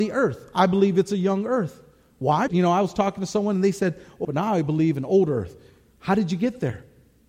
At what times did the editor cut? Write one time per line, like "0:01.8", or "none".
0:02.5
0:04.2

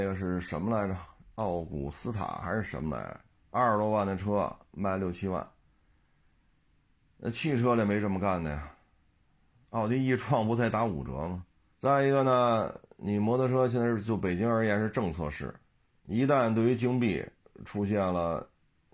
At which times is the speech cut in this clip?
0:11.7

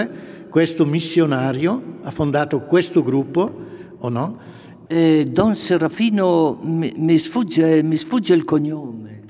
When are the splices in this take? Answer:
0:04.9

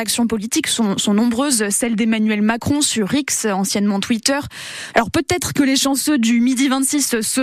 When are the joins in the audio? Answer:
0:04.9

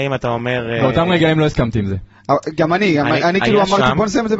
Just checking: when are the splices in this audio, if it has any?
none

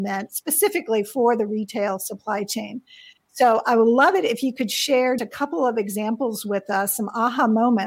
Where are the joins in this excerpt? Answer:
0:05.2

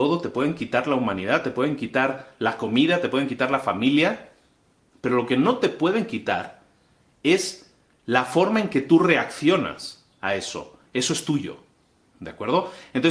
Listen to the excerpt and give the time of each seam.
none

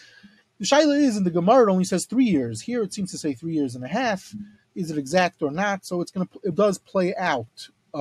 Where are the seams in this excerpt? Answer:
0:06.5

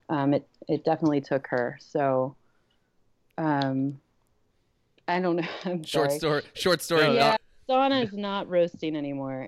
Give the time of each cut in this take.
0:07.4

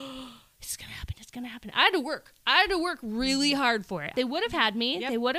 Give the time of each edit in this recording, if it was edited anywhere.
0:04.1

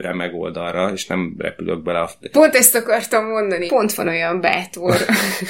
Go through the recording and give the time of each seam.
0:02.3
0:03.7

